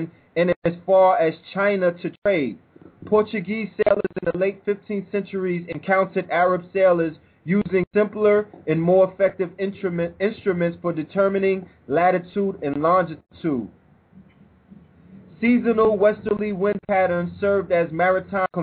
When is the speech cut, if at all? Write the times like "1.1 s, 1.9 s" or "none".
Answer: none